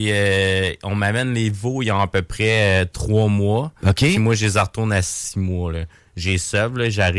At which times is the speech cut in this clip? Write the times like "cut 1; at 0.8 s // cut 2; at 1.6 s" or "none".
none

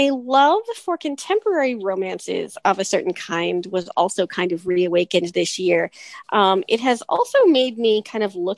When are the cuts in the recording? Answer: cut 1; at 6.2 s

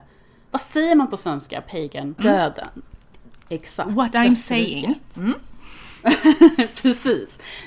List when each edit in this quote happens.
cut 1; at 2.2 s

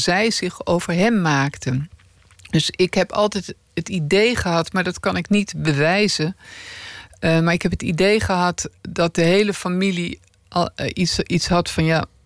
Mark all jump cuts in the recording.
none

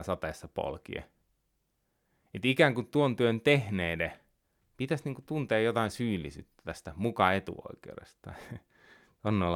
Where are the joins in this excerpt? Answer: cut 1; at 4.6 s

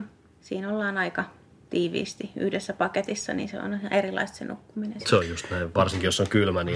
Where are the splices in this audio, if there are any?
none

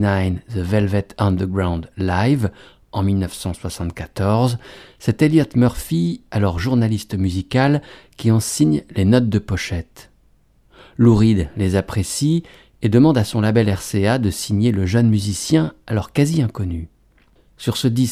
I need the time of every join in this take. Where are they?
none

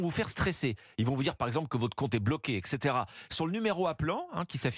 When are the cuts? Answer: none

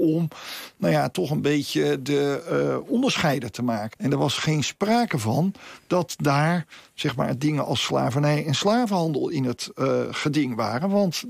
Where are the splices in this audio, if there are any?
cut 1; at 3.9 s

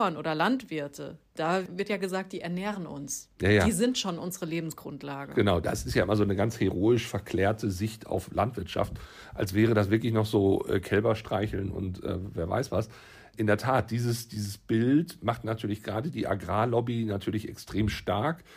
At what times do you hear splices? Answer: none

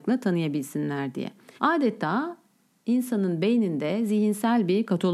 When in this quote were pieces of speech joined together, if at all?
cut 1; at 1.6 s

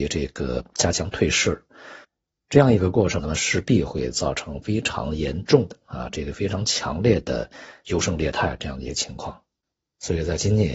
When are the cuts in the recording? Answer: cut 1; at 3.2 s

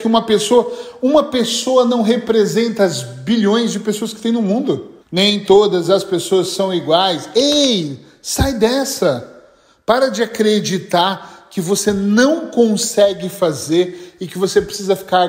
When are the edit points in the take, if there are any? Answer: cut 1; at 5.0 s

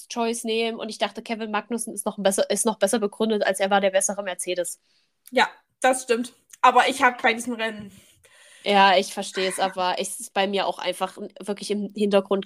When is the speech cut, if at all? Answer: none

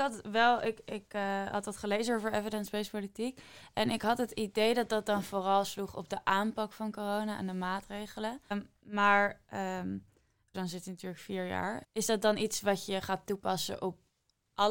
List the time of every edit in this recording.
cut 1; at 8.5 s // cut 2; at 10.5 s // cut 3; at 11.8 s

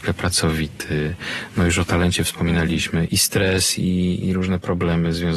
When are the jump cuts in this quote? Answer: cut 1; at 3.1 s // cut 2; at 4.2 s

